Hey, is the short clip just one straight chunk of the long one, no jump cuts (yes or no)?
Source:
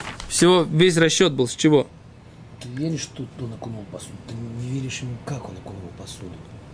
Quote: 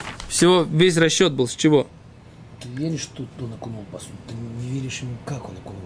yes